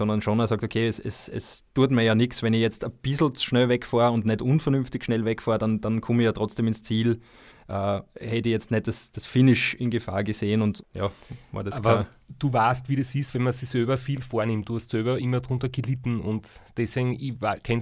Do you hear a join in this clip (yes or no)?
yes